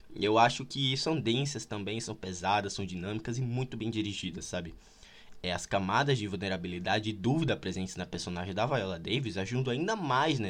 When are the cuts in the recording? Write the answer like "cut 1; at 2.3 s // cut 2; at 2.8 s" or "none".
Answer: none